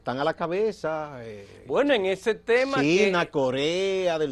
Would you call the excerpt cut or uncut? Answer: uncut